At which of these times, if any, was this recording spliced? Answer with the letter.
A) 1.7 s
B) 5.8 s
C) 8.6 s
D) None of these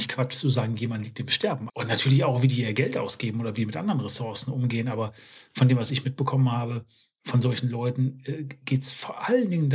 A